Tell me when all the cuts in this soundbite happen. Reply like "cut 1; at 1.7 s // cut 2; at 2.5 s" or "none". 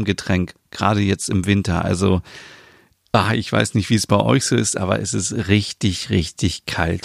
none